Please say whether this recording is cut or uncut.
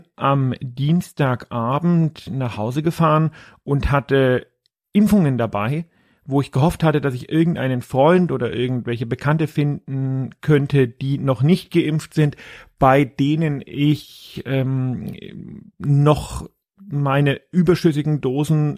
uncut